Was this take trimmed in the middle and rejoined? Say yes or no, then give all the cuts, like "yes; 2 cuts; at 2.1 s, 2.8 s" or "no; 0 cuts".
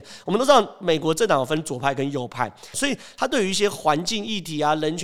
yes; 1 cut; at 2.7 s